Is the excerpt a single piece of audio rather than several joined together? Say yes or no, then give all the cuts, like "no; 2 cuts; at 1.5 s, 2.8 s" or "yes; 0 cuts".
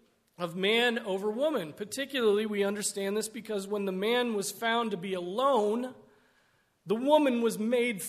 yes; 0 cuts